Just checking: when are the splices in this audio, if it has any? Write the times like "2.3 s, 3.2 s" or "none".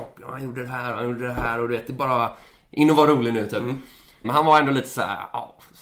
4.2 s